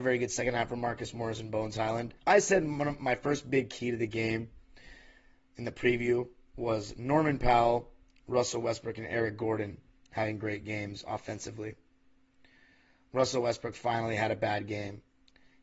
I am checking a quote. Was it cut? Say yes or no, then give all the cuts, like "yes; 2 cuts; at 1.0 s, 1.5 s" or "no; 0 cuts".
yes; 1 cut; at 2.2 s